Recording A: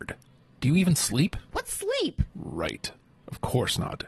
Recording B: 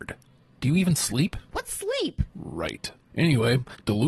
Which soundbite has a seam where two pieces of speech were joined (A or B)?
B